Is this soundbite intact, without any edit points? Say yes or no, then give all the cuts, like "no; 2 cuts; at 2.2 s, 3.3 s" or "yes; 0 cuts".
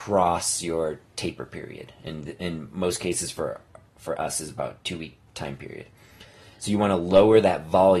yes; 0 cuts